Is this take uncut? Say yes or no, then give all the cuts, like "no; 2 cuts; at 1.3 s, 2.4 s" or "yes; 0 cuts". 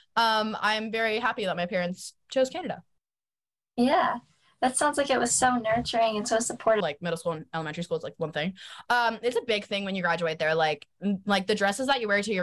no; 1 cut; at 6.8 s